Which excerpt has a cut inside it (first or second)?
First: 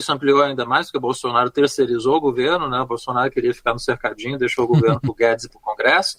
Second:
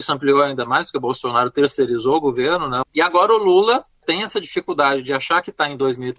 second